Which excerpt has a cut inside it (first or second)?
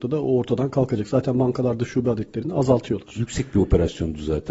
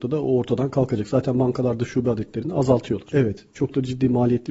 second